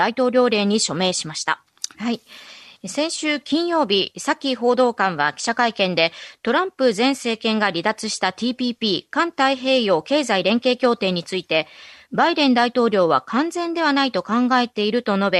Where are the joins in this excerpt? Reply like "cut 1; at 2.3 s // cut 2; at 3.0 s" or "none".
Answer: cut 1; at 1.9 s